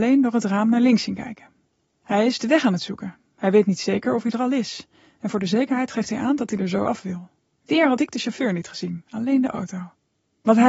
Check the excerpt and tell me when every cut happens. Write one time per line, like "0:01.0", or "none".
none